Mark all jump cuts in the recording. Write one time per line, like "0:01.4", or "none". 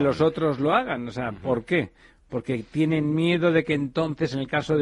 none

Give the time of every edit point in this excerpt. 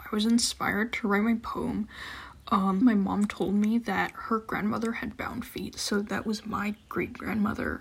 0:02.8

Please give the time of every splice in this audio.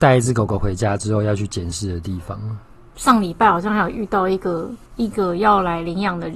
0:03.0
0:04.9

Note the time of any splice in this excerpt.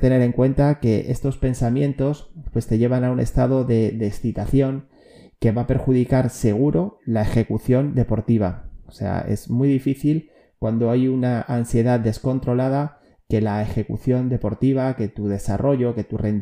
none

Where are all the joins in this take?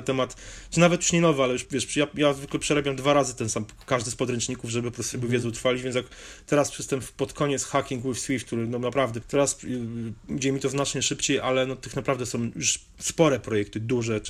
0:01.6
0:09.2

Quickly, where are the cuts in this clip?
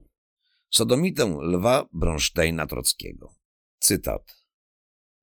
0:03.6

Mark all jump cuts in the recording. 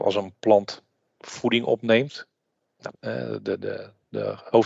0:02.9

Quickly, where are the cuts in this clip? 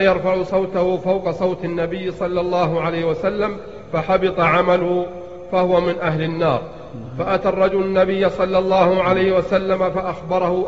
none

